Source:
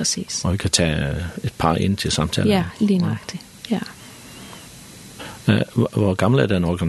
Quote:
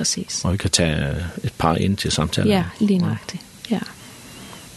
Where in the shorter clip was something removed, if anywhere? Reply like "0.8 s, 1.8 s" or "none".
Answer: none